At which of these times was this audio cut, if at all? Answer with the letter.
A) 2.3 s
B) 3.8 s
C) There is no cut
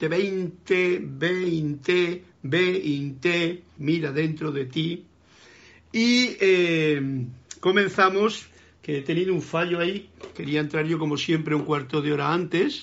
B